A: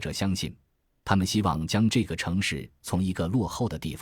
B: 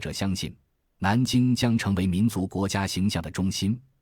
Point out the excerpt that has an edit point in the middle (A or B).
A